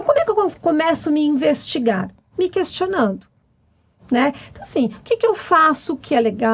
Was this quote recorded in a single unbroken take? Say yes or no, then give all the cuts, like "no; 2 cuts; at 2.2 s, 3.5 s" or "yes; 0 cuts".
yes; 0 cuts